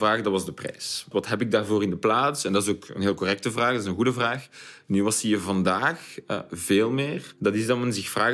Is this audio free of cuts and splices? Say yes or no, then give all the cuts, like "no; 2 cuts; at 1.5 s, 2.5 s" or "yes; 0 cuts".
no; 1 cut; at 1.1 s